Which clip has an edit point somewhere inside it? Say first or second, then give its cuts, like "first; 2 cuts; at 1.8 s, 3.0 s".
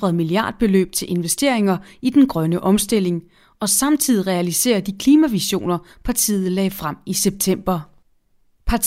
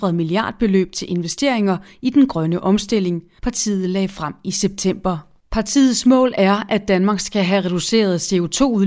second; 2 cuts; at 3.4 s, 5.5 s